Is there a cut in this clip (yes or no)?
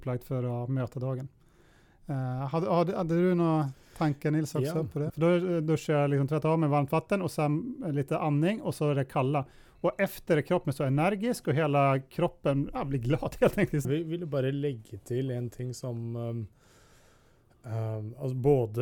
yes